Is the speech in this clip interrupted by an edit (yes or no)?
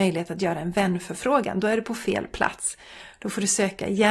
no